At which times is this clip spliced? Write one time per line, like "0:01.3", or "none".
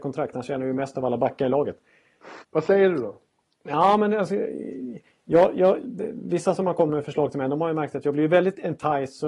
0:02.4
0:05.8